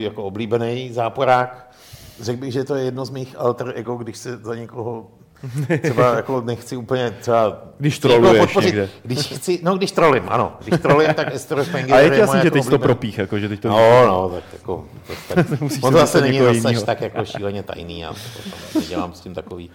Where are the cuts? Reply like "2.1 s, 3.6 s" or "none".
none